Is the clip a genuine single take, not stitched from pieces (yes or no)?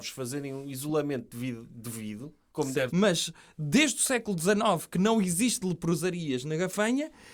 no